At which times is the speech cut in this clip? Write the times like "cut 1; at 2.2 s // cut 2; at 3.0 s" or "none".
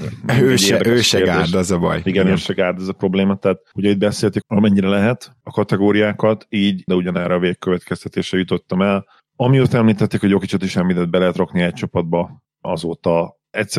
cut 1; at 4.4 s // cut 2; at 6.9 s